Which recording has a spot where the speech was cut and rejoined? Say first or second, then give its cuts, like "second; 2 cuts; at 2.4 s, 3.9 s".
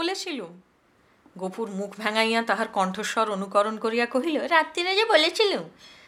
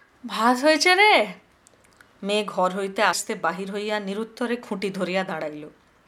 second; 1 cut; at 3.1 s